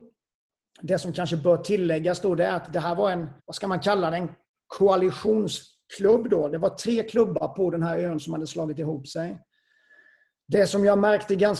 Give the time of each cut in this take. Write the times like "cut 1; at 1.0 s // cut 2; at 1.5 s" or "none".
cut 1; at 3.4 s